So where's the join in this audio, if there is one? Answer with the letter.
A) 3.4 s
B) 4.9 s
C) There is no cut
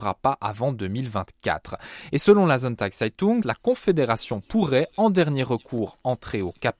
A